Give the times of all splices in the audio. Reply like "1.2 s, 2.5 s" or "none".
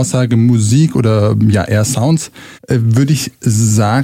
2.5 s

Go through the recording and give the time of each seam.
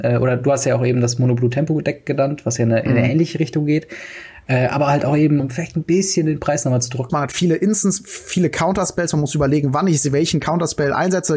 5.4 s, 7.1 s

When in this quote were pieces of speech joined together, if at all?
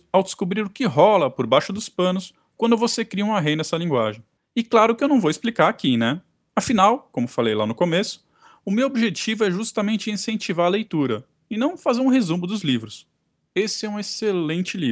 13.5 s

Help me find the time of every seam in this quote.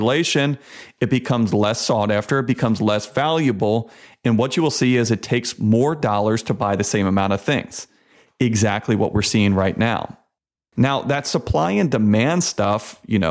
none

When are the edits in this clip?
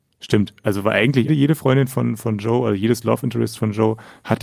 1.3 s

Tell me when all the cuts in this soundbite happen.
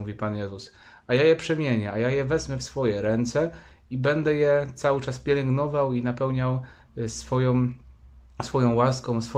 none

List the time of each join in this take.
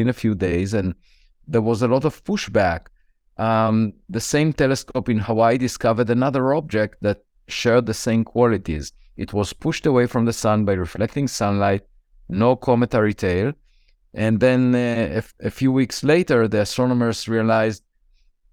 4.0 s

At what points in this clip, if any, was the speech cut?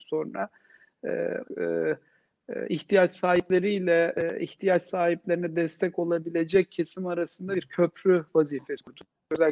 1.4 s

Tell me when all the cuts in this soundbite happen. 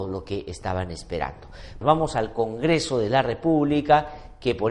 1.8 s

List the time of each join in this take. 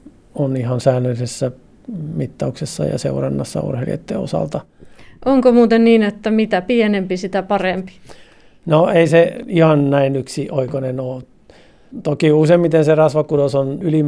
none

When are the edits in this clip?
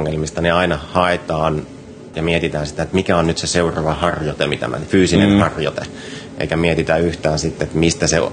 2.1 s

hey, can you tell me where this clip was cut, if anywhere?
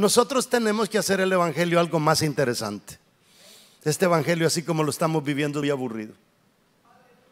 5.6 s

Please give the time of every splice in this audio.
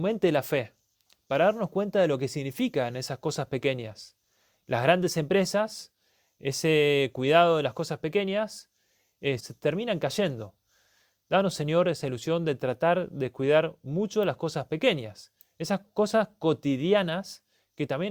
9.4 s

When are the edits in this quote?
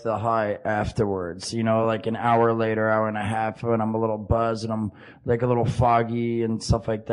none

